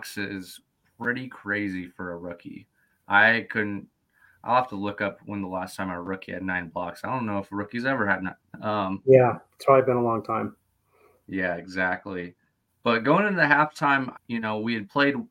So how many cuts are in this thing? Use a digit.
2